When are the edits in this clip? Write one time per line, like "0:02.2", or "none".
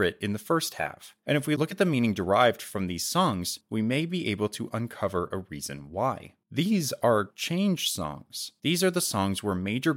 none

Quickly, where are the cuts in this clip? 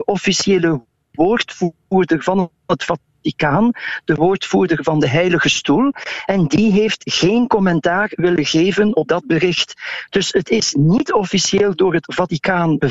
none

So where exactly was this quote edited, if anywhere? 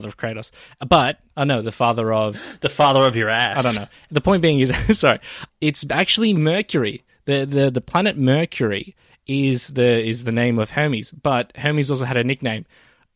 0:01.3
0:05.5

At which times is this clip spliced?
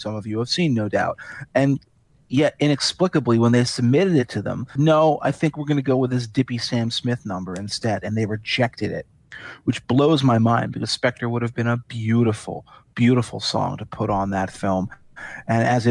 0:04.8

